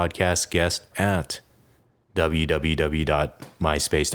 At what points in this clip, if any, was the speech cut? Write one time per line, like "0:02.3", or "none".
0:00.9